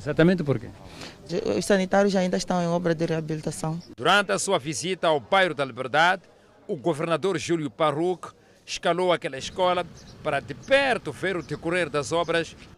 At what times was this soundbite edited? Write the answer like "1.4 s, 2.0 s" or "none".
1.3 s